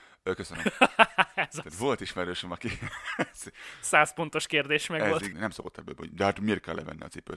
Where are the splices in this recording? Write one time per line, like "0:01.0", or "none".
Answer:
0:05.3